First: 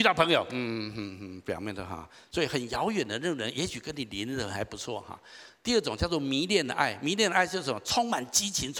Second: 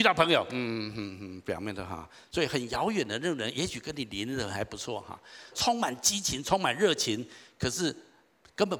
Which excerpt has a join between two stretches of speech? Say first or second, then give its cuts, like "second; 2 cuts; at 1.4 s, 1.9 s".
second; 1 cut; at 5.5 s